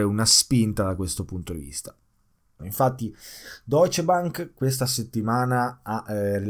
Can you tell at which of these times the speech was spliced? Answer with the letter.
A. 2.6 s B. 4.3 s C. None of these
A